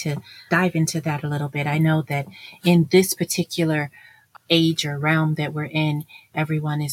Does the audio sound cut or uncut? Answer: uncut